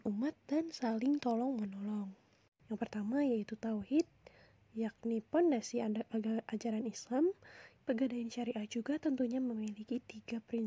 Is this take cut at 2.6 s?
yes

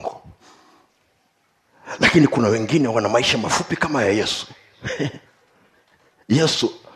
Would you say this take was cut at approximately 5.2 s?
yes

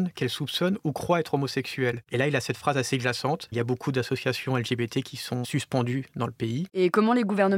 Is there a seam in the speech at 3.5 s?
yes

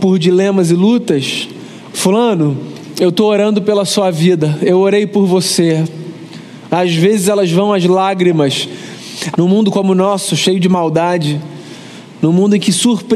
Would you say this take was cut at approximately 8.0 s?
no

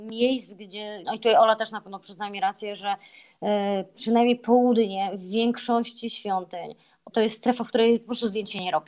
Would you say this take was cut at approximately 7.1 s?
yes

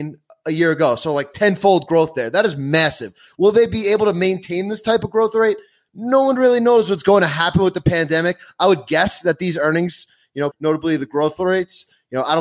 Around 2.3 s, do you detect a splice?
no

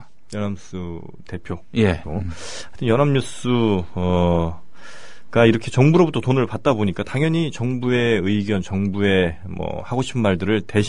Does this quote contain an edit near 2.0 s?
yes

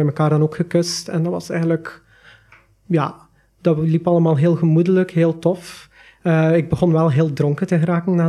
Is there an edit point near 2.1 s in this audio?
no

